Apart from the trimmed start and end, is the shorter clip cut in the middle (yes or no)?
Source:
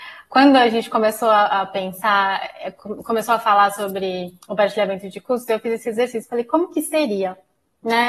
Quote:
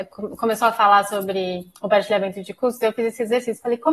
no